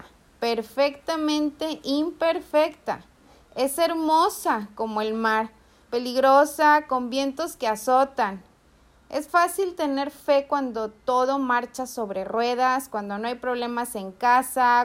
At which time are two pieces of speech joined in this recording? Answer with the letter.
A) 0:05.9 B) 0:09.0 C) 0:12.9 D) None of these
A